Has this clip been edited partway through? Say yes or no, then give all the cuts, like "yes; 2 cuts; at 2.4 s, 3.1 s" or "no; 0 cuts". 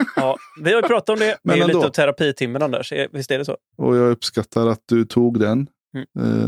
yes; 1 cut; at 3.7 s